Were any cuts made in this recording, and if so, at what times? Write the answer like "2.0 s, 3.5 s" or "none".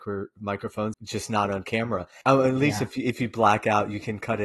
0.9 s, 2.2 s

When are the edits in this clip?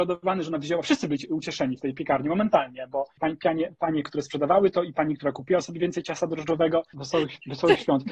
3.2 s, 6.9 s

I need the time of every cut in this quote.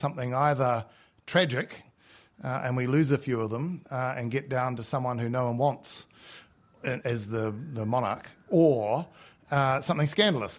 7.0 s

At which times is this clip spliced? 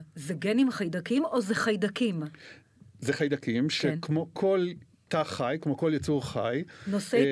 none

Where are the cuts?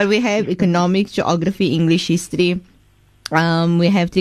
none

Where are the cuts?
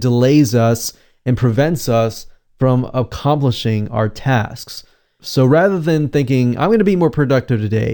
5.2 s

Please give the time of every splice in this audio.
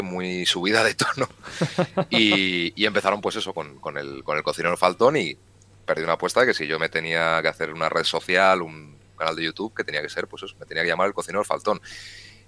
none

